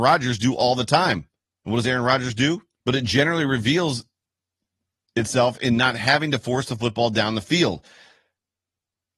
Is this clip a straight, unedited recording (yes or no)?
no